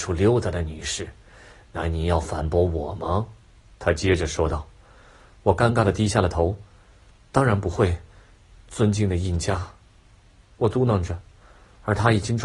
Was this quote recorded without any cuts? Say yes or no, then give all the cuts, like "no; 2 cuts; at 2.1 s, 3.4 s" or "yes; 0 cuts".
yes; 0 cuts